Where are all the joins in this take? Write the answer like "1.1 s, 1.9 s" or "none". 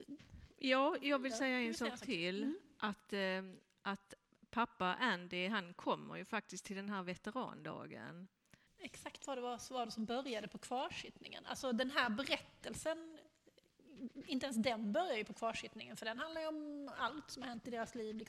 8.7 s